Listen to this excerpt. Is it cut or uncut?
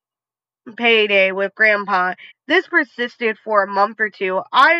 cut